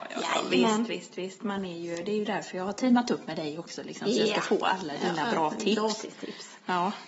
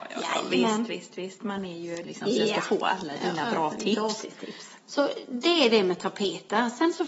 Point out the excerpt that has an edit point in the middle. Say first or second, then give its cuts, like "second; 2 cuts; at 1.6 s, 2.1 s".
second; 2 cuts; at 2.0 s, 4.8 s